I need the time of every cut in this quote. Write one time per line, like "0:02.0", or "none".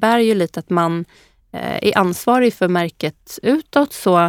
none